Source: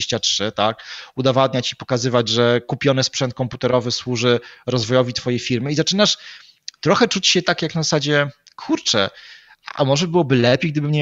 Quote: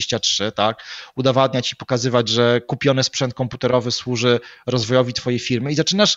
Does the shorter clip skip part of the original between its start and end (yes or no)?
no